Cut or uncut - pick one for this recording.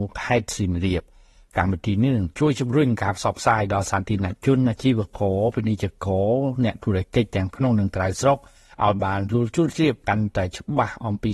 uncut